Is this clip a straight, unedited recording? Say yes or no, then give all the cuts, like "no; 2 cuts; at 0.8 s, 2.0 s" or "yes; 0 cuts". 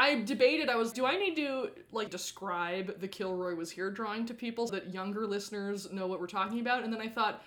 no; 3 cuts; at 0.9 s, 2.1 s, 4.7 s